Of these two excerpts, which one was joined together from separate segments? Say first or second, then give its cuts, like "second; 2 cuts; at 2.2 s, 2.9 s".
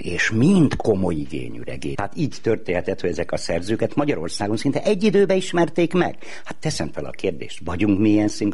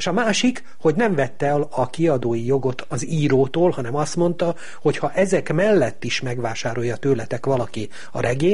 first; 1 cut; at 1.9 s